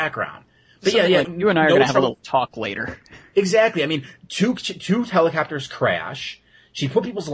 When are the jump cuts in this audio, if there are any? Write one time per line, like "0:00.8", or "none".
0:01.2